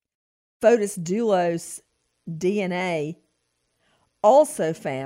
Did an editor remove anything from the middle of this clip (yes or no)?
no